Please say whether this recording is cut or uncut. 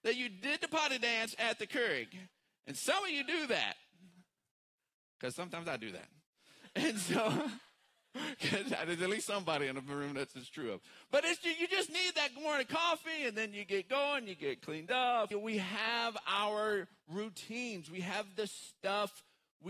cut